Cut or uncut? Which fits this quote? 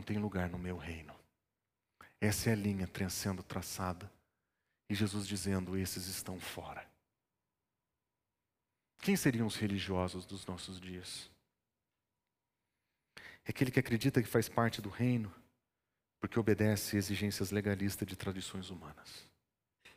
uncut